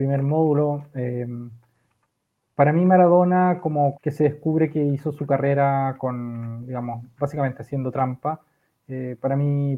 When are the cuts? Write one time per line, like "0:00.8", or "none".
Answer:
0:03.9